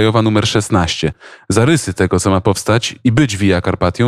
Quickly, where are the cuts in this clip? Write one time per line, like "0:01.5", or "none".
none